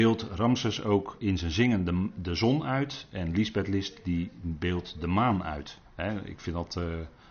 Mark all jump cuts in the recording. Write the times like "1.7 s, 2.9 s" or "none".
5.9 s